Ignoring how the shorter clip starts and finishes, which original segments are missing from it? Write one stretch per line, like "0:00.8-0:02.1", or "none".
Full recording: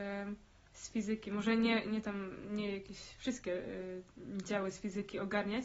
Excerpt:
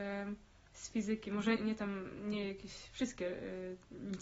0:01.6-0:01.8